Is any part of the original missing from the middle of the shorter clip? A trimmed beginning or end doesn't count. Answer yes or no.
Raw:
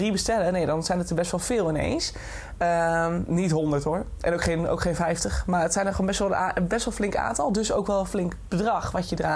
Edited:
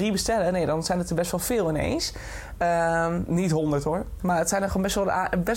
yes